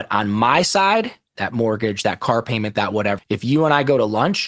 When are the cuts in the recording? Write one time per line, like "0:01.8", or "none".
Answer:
0:01.4
0:03.2